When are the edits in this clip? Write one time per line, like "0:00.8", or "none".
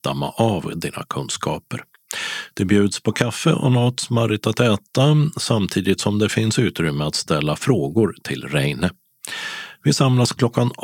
none